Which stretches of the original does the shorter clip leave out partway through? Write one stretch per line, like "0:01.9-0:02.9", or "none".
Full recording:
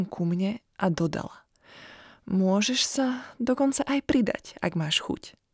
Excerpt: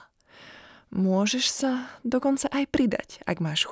none